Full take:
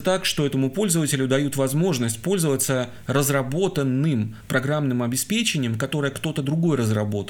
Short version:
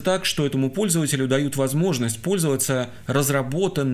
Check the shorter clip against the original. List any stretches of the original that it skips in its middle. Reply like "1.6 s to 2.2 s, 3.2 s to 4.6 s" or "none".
none